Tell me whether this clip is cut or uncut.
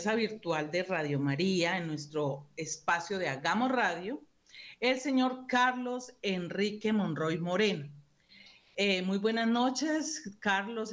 uncut